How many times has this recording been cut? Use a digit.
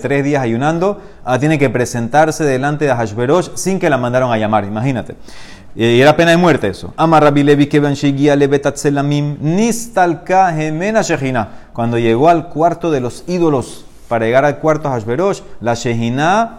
0